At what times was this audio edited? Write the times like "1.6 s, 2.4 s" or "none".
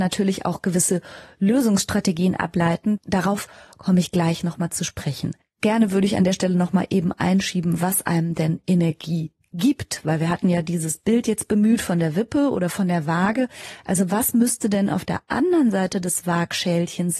none